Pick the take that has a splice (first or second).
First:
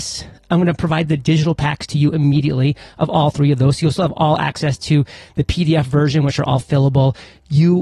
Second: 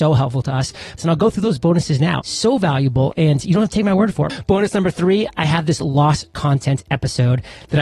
second